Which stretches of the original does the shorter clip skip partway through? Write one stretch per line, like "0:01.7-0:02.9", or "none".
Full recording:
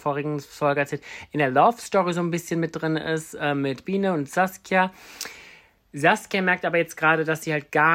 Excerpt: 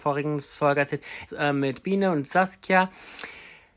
0:01.3-0:03.3